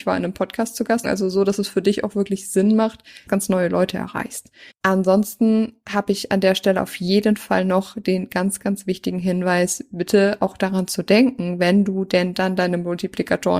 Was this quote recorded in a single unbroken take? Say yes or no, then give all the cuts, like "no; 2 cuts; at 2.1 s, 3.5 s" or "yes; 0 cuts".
no; 3 cuts; at 1.0 s, 3.3 s, 4.7 s